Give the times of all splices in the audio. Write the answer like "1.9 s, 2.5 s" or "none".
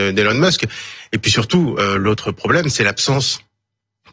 none